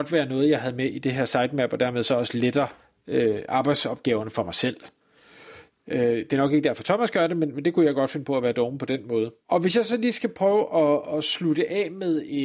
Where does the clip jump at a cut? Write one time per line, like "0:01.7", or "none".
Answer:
0:09.4